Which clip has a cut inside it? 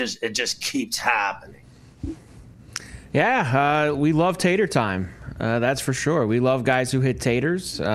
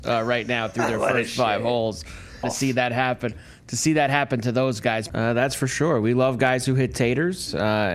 second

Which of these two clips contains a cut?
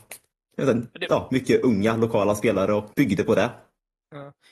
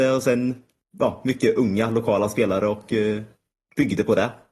first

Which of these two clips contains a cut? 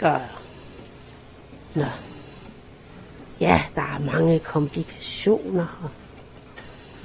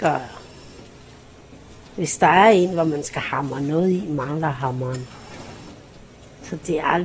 first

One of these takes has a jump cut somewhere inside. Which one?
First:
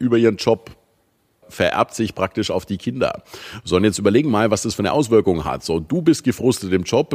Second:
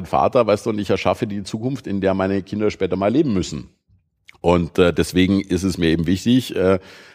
first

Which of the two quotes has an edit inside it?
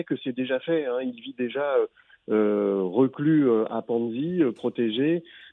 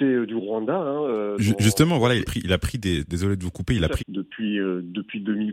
second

